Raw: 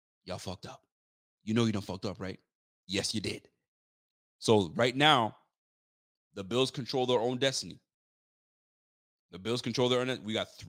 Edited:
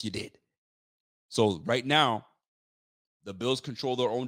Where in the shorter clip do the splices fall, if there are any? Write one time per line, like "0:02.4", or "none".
none